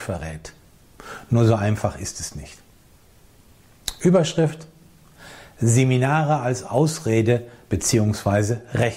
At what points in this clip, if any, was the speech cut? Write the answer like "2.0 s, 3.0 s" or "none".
none